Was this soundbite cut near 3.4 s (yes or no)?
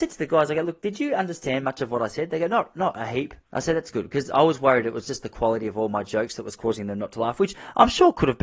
yes